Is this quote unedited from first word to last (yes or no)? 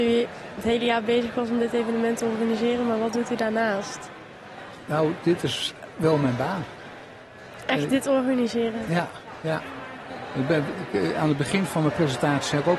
yes